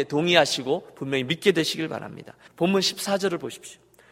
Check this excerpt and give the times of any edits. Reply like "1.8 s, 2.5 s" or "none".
2.5 s